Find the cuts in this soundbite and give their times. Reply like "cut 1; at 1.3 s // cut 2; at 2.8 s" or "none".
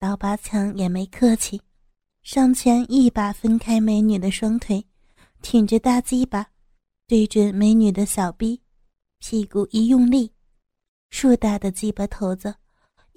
none

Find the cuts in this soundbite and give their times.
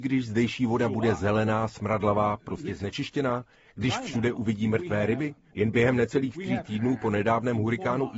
cut 1; at 5.5 s

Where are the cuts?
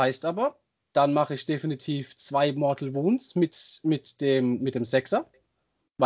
none

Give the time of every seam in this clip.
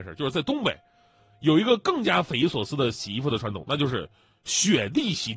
none

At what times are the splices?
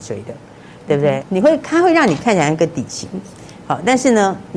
cut 1; at 1.2 s

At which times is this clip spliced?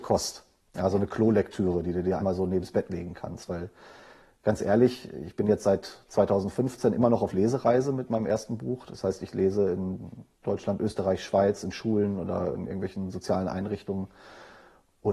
cut 1; at 2.2 s

